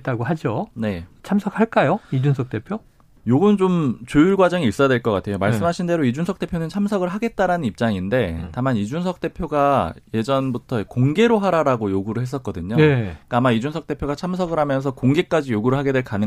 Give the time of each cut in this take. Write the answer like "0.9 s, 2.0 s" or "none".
none